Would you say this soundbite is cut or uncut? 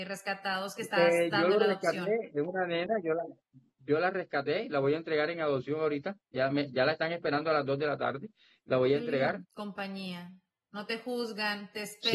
cut